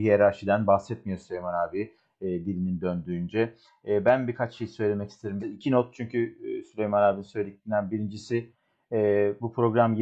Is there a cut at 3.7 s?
no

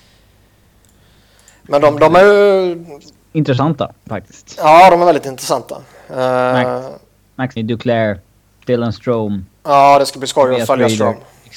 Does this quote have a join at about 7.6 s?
yes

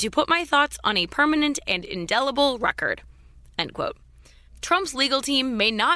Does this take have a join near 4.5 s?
yes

